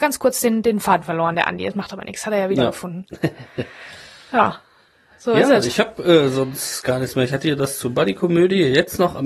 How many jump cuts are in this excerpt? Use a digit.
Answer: 0